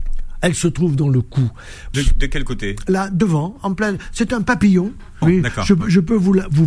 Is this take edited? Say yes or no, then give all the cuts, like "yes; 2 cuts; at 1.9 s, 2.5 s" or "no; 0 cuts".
yes; 2 cuts; at 1.9 s, 5.2 s